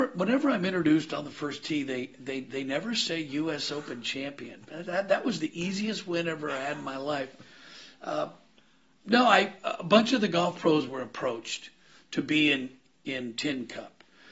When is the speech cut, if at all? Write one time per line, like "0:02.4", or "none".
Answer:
none